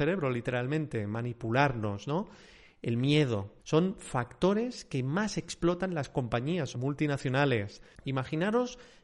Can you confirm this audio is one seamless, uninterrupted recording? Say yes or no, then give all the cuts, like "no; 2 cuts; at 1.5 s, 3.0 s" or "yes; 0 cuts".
no; 3 cuts; at 3.6 s, 6.7 s, 8.0 s